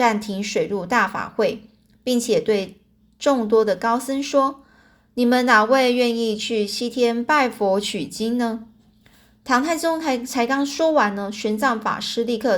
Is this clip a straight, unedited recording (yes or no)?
yes